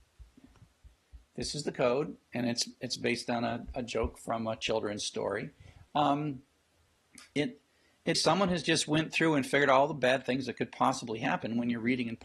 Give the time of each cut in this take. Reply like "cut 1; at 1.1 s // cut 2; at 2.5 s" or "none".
cut 1; at 8.1 s